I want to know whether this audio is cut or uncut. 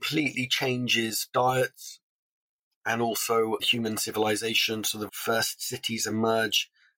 cut